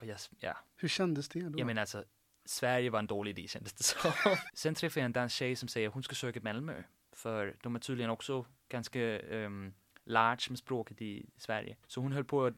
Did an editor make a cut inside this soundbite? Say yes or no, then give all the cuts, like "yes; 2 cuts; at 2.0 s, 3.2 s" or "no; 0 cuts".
yes; 1 cut; at 4.5 s